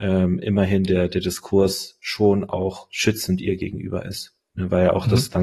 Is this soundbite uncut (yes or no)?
yes